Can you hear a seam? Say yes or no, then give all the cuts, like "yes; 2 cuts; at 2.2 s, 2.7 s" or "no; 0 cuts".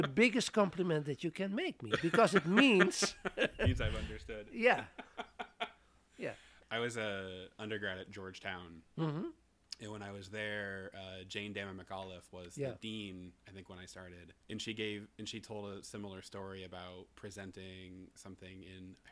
yes; 1 cut; at 14.4 s